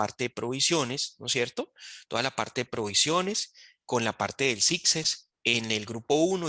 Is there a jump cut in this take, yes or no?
no